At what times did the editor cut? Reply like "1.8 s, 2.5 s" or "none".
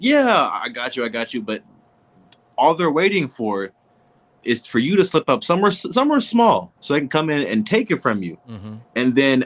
6.8 s